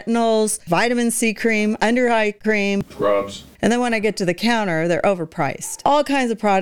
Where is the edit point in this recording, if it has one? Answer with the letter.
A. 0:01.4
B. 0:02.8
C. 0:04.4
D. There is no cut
B